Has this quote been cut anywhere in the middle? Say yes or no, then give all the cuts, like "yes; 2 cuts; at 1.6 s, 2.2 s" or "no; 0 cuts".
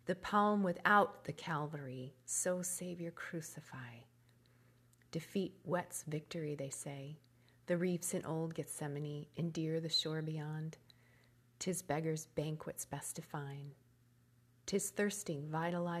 no; 0 cuts